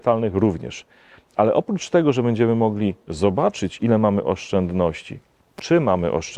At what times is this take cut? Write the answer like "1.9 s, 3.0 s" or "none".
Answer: none